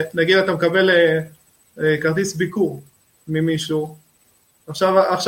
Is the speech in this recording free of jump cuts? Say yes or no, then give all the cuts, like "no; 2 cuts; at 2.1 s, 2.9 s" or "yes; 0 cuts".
yes; 0 cuts